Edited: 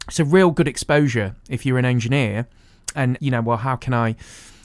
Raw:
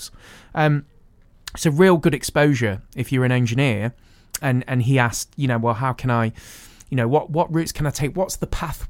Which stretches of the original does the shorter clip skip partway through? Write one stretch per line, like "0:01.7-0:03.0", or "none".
0:04.6-0:05.4

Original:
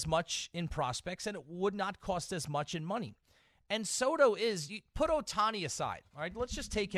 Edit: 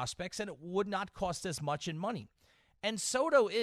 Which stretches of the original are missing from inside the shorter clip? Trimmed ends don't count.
none

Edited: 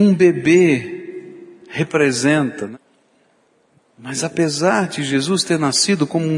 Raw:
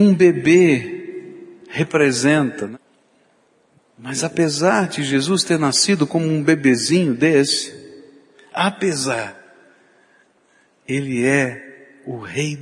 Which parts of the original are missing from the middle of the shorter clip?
none

